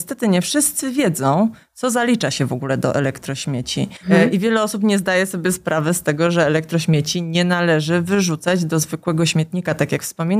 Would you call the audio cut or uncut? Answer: cut